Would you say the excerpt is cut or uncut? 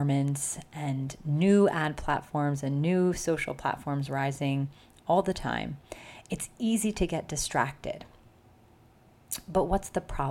uncut